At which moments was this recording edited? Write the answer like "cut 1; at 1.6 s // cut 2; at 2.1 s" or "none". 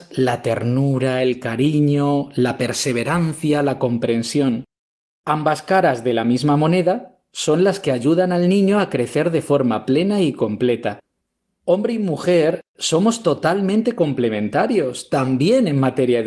none